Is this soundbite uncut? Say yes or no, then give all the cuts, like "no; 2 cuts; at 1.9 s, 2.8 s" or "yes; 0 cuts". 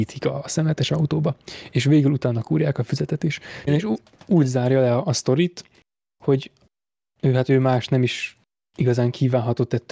no; 1 cut; at 3.7 s